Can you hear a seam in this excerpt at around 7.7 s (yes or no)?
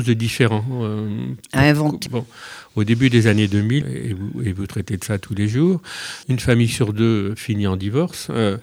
no